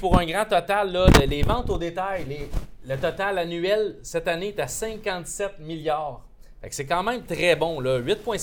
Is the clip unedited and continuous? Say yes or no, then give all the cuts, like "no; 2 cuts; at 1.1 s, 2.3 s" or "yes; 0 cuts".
yes; 0 cuts